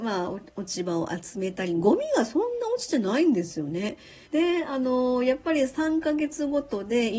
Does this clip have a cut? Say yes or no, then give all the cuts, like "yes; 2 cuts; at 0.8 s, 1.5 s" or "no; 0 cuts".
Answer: yes; 1 cut; at 4.3 s